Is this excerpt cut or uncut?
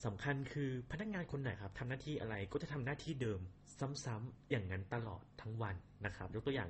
cut